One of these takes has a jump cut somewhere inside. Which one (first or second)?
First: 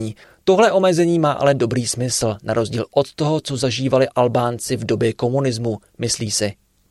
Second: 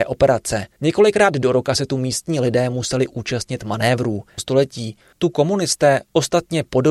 second